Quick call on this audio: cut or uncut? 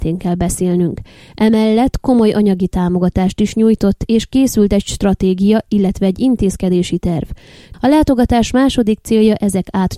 cut